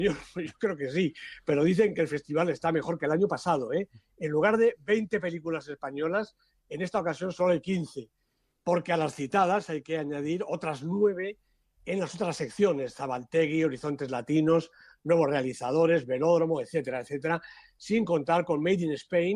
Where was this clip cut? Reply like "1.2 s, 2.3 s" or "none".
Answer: none